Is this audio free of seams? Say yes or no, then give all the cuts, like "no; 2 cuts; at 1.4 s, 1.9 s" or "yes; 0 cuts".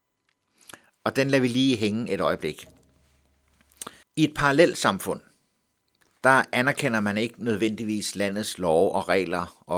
no; 1 cut; at 4.0 s